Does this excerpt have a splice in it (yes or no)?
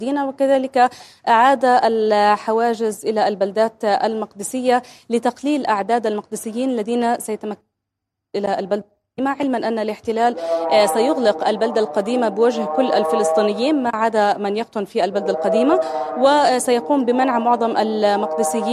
no